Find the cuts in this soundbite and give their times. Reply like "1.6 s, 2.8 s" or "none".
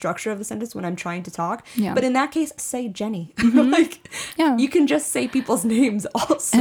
2.6 s